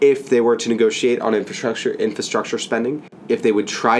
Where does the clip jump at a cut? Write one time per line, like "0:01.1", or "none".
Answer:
none